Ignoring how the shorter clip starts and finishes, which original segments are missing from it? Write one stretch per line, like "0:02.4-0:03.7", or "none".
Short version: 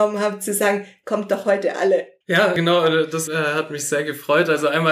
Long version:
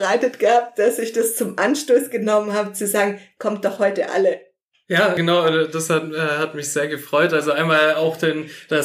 0:04.5-0:04.8
0:05.9-0:06.1